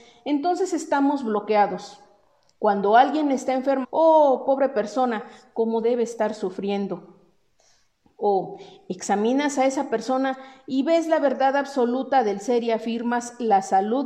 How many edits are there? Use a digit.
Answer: 1